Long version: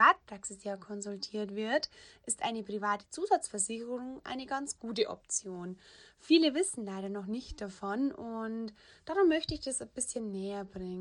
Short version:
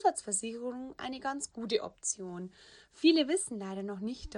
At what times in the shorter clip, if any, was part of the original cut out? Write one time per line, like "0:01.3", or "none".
none